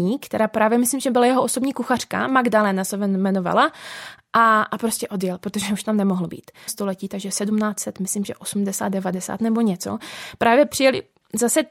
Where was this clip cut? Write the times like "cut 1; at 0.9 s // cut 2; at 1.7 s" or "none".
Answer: cut 1; at 6.7 s

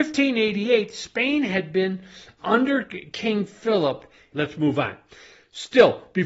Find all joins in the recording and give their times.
cut 1; at 2.4 s // cut 2; at 4.3 s

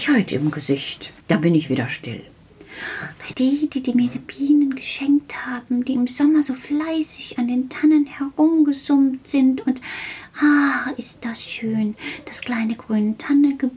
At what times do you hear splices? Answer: cut 1; at 1.2 s // cut 2; at 3.3 s

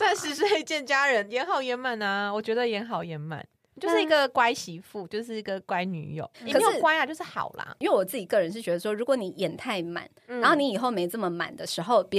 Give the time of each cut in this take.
cut 1; at 6.3 s // cut 2; at 7.8 s

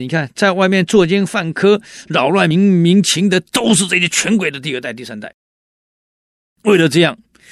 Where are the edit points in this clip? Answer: cut 1; at 2.5 s

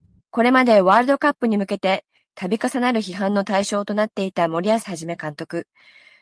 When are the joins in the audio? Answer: none

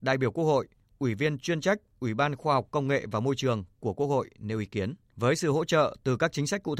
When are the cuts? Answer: cut 1; at 5.0 s

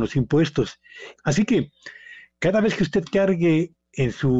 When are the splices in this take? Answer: cut 1; at 1.2 s

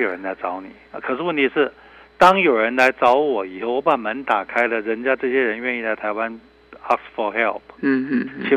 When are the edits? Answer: none

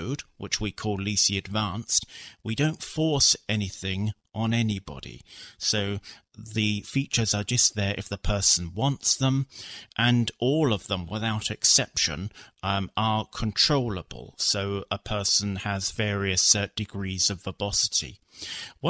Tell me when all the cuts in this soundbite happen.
none

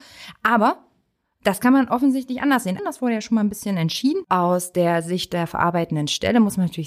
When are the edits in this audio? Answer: cut 1; at 2.8 s // cut 2; at 4.2 s

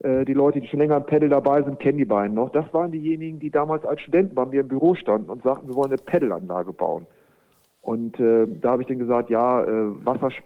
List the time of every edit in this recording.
none

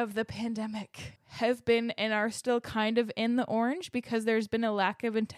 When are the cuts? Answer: cut 1; at 1.2 s

